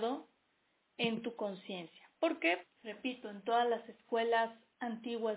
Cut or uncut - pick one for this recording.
cut